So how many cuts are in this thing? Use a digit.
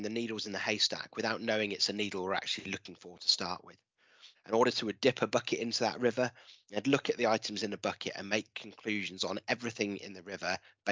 1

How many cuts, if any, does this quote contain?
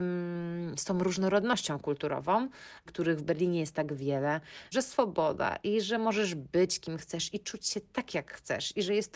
2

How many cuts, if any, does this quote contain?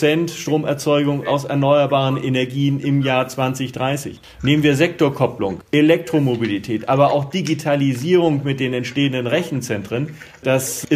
2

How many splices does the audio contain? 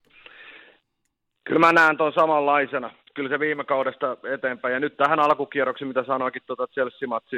0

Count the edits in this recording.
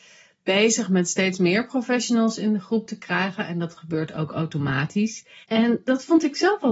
1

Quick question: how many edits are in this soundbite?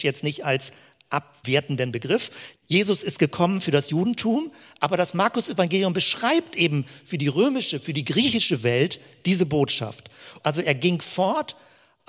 2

